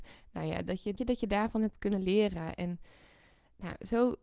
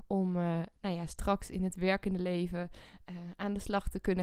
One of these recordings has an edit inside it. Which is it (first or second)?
first